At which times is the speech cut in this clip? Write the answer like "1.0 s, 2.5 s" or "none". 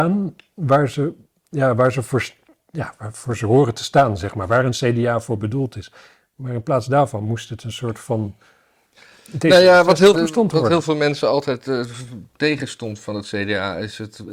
10.1 s